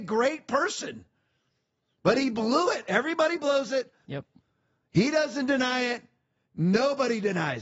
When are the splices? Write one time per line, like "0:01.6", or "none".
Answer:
0:04.0

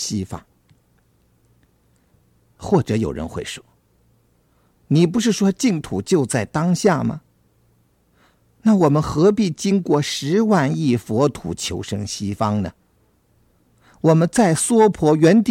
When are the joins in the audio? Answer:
none

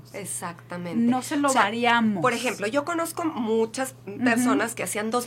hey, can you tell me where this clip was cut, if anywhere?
none

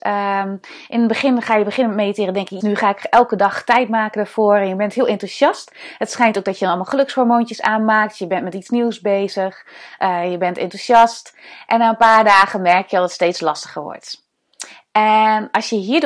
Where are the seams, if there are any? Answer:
0:02.6

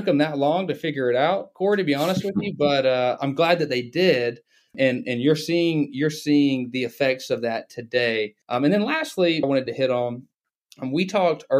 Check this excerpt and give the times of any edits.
0:08.4
0:09.4

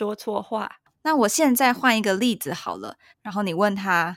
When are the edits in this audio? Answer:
0:00.9
0:03.1

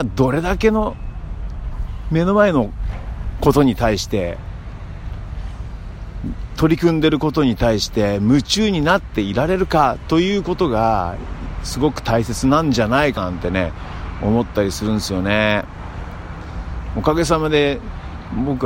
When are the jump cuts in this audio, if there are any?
0:13.2

